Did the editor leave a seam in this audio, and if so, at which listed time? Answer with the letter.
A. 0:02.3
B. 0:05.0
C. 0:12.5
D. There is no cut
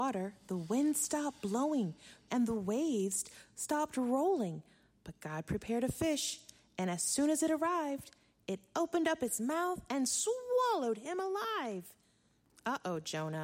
A